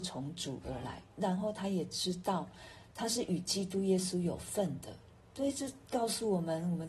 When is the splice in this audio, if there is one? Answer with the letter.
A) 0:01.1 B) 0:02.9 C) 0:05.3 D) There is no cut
D